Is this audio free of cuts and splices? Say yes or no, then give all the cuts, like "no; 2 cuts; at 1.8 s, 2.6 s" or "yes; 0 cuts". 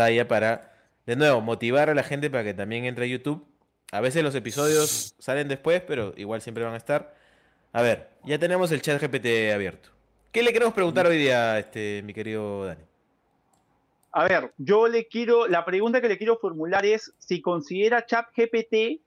yes; 0 cuts